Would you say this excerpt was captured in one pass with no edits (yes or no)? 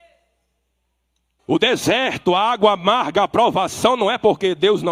no